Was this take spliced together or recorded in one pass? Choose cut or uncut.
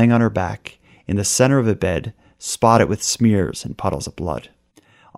uncut